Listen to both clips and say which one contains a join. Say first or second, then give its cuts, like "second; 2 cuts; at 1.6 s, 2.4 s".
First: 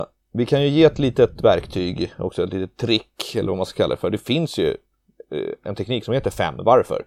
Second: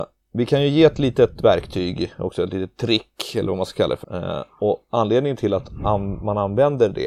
second; 1 cut; at 4.0 s